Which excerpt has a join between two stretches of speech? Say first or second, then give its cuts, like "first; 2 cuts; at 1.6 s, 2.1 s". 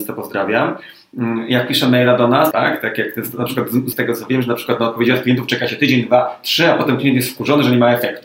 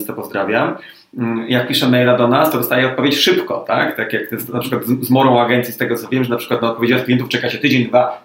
first; 2 cuts; at 2.5 s, 3.9 s